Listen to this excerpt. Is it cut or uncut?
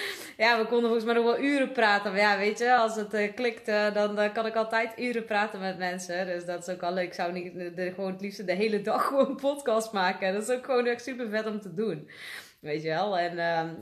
uncut